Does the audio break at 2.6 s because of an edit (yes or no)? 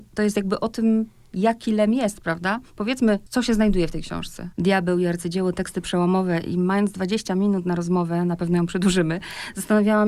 no